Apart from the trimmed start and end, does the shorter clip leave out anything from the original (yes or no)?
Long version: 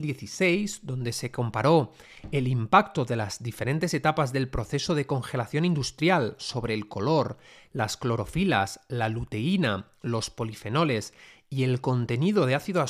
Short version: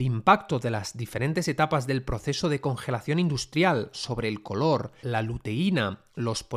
yes